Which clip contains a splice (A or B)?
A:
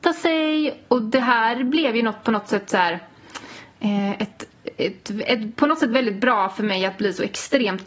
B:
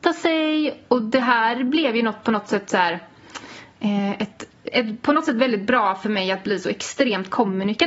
B